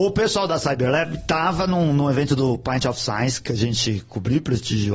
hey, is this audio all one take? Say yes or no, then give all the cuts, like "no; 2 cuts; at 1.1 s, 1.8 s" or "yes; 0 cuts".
yes; 0 cuts